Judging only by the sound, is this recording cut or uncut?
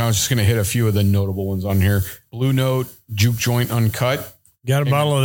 cut